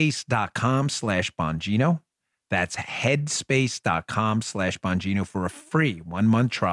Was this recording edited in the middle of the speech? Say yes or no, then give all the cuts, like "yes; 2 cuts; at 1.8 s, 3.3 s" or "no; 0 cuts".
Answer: no; 0 cuts